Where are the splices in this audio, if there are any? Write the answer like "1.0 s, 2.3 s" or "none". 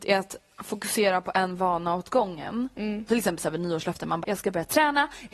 3.1 s, 4.2 s